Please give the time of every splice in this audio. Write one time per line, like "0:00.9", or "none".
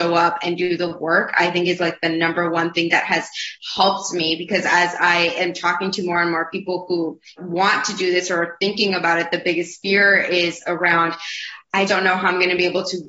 0:07.4
0:11.9